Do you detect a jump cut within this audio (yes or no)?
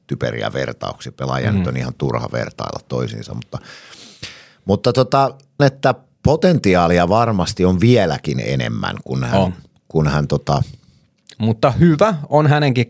yes